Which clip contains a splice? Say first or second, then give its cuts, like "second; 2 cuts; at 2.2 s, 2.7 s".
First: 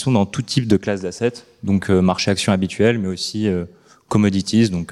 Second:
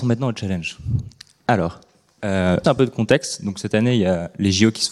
second; 1 cut; at 2.6 s